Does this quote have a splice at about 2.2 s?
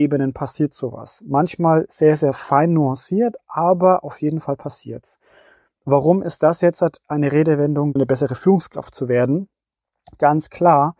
no; 1 cut; at 8.0 s

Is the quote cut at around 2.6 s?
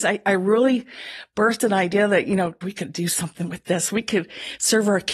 yes; 1 cut; at 2.6 s

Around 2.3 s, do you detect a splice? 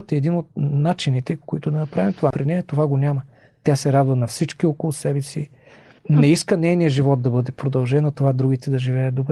yes; 1 cut; at 2.3 s

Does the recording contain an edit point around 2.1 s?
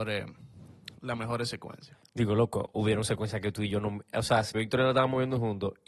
no; 1 cut; at 4.5 s

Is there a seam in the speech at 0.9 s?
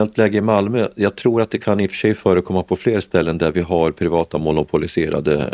no; 0 cuts

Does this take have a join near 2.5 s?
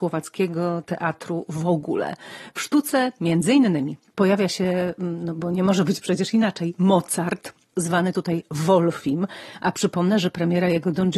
no; 0 cuts

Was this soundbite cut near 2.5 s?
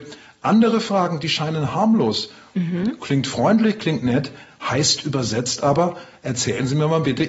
yes; 1 cut; at 2.5 s

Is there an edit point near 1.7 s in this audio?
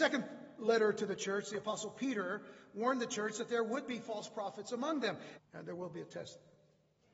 no; 1 cut; at 5.4 s

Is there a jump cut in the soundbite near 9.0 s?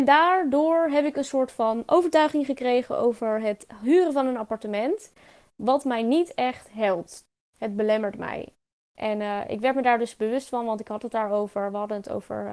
yes; 1 cut; at 9.0 s

